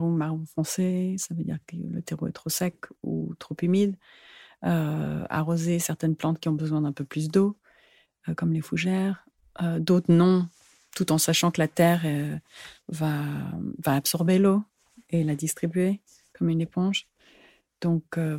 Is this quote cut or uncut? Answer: uncut